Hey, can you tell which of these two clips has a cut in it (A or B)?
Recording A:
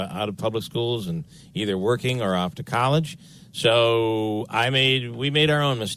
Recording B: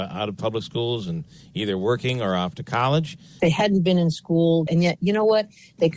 B